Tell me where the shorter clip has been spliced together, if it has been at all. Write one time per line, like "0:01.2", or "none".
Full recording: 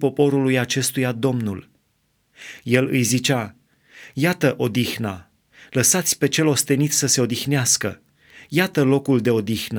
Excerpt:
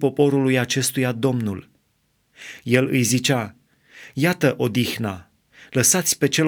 none

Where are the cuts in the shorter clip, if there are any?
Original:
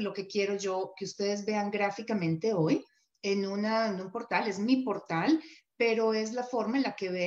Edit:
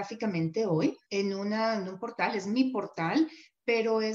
0:01.0

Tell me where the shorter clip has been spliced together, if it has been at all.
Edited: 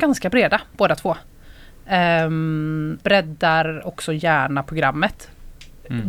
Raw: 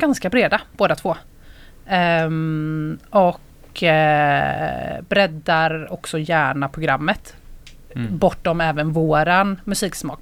0:03.0

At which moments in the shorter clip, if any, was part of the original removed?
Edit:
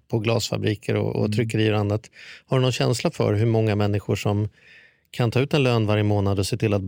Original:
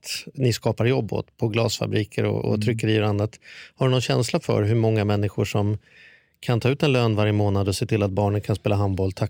none

